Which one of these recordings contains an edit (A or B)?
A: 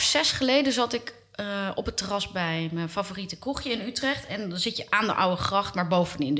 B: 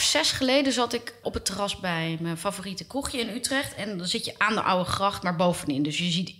B